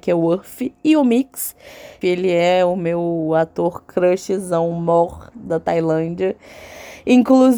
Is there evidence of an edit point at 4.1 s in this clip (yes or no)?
no